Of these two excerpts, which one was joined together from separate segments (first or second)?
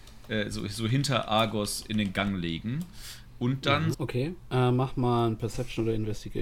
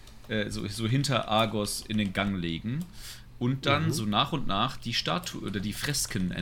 first